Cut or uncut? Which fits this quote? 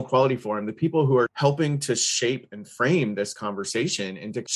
uncut